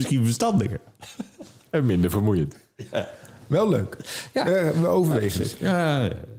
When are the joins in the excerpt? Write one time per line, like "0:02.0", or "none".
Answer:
none